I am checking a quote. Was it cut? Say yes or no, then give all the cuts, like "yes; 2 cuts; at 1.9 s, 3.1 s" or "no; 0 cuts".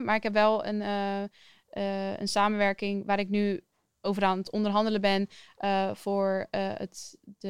no; 0 cuts